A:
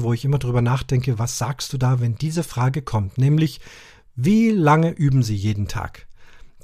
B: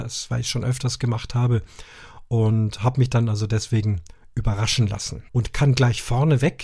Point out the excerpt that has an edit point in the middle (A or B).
B